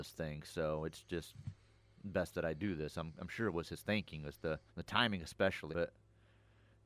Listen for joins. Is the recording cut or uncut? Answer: cut